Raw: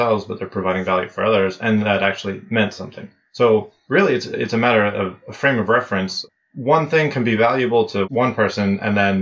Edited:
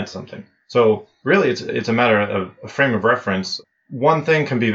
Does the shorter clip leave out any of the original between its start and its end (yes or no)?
no